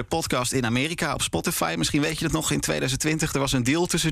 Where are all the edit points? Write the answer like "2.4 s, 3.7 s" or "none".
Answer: none